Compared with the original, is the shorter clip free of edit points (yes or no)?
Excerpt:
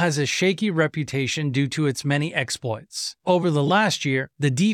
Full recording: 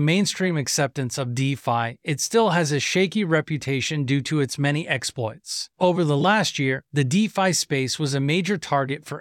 yes